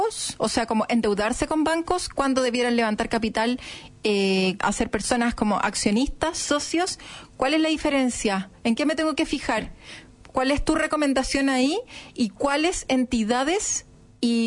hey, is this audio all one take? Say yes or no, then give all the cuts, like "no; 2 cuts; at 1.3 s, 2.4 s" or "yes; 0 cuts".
yes; 0 cuts